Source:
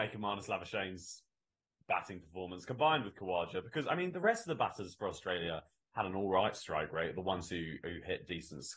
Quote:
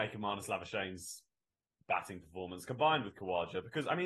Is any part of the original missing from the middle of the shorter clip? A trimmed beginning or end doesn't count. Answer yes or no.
no